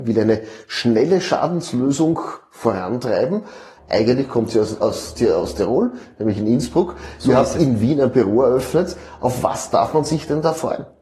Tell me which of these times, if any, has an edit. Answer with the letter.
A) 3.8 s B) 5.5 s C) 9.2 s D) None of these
A